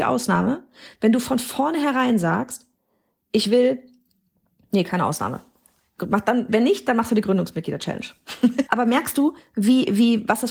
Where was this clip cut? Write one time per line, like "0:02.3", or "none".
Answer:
0:06.5
0:08.7

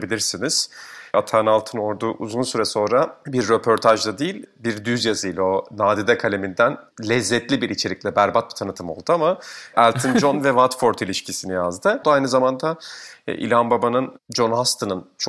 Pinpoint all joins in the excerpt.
0:01.1
0:12.0

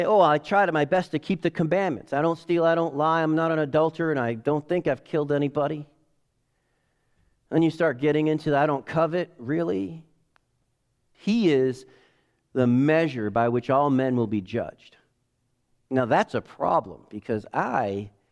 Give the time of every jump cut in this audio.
0:11.1

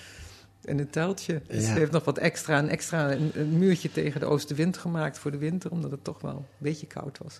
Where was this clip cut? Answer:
none

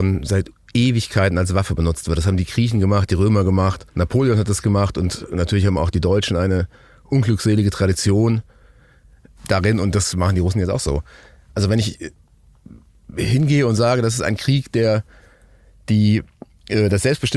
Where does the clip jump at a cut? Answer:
0:03.9

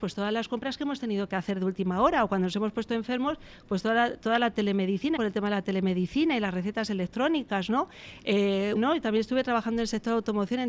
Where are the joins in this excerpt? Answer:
0:05.2
0:08.8

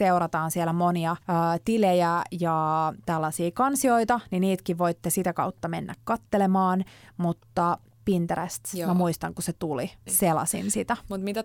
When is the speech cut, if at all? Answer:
0:01.2
0:10.1

